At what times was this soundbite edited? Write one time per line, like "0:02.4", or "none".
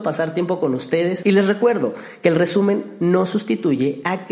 0:01.2